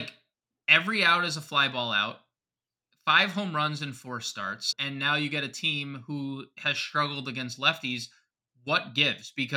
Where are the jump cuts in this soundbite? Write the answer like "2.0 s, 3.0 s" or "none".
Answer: 4.7 s